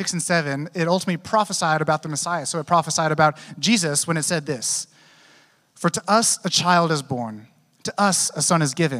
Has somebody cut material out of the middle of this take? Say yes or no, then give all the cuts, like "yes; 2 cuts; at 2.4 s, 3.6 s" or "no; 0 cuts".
no; 0 cuts